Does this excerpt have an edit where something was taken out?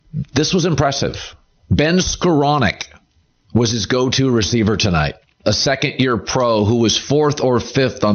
no; 0 cuts

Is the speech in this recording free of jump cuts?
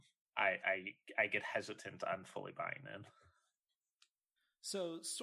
yes; 0 cuts

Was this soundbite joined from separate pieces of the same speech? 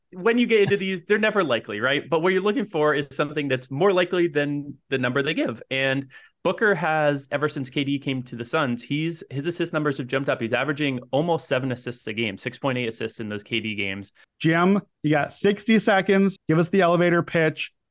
yes; 2 cuts; at 14.2 s, 16.4 s

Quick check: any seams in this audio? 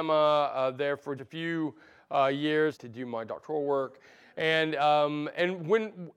yes; 2 cuts; at 1.2 s, 2.7 s

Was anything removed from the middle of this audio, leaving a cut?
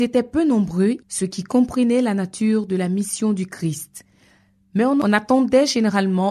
yes; 1 cut; at 1.0 s

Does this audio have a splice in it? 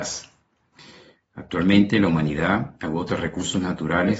yes; 1 cut; at 1.2 s

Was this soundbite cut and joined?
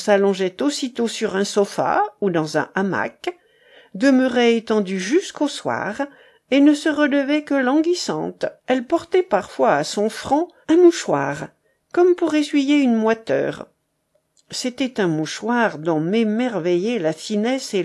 yes; 2 cuts; at 8.6 s, 10.6 s

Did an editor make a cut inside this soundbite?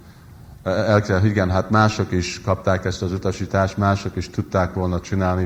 no; 0 cuts

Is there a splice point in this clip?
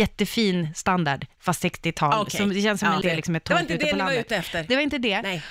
yes; 1 cut; at 3.0 s

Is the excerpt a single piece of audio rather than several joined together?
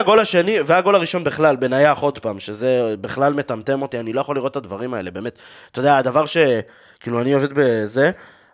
yes; 0 cuts

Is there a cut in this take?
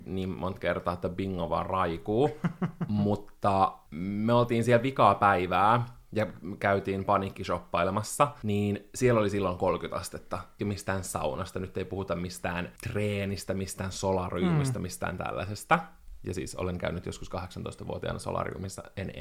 yes; 1 cut; at 10.6 s

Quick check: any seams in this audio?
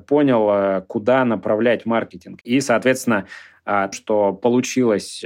yes; 2 cuts; at 2.4 s, 3.9 s

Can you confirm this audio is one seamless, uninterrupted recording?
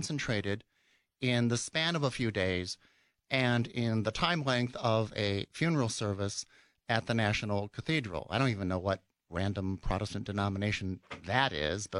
yes; 0 cuts

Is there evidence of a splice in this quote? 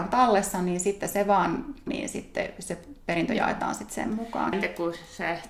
yes; 2 cuts; at 1.9 s, 4.5 s

